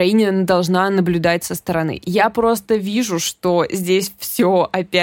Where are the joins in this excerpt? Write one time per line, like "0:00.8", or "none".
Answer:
none